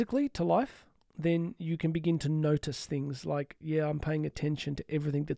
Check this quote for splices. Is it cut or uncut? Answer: uncut